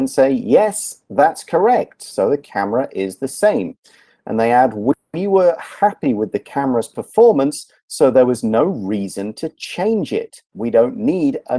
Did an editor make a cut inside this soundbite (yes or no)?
yes